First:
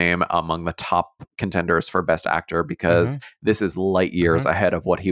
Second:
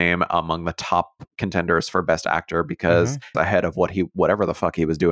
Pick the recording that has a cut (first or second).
second